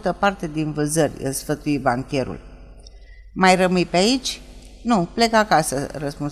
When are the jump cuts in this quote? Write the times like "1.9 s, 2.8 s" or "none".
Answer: none